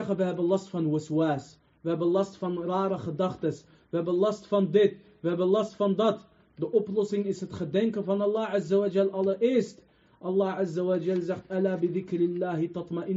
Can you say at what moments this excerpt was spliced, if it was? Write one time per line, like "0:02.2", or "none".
none